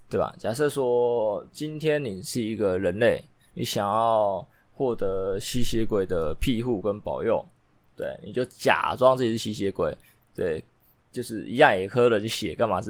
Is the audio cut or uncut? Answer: uncut